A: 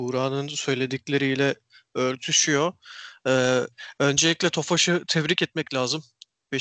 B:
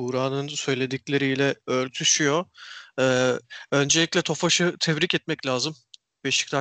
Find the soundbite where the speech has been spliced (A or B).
B